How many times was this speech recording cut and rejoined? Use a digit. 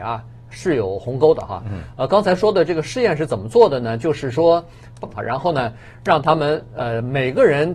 1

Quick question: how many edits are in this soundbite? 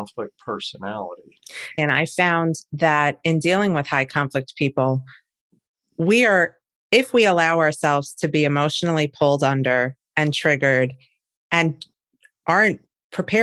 1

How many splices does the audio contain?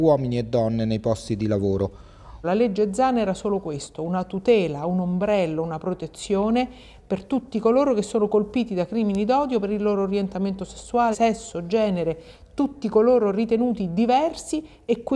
2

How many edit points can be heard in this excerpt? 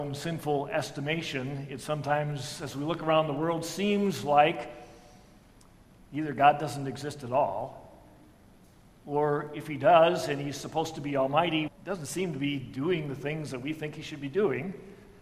1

